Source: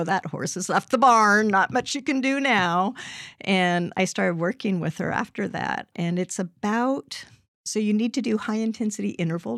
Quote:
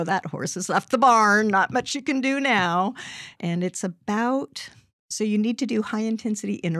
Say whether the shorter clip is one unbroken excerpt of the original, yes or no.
no